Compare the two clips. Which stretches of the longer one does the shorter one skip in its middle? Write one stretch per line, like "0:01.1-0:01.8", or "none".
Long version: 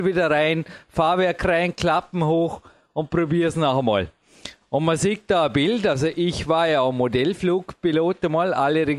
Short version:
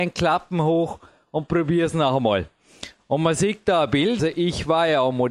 0:05.8-0:06.0